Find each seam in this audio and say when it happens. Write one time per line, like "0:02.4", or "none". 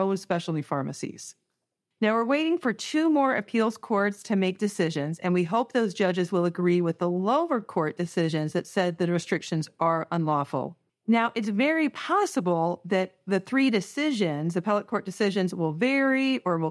0:10.9